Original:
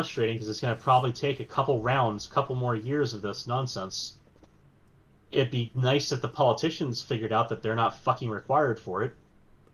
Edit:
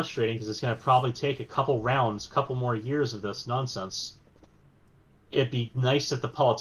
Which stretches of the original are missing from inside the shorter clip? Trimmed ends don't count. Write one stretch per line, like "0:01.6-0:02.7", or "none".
none